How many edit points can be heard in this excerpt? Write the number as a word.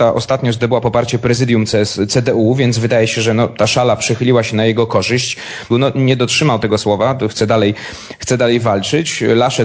one